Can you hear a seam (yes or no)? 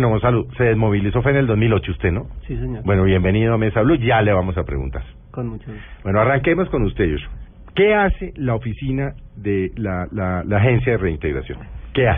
no